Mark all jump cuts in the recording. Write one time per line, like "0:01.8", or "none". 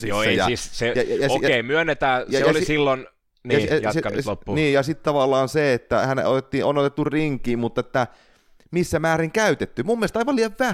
none